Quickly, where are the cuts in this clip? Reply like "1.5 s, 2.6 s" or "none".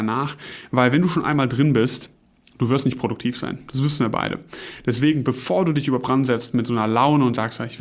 none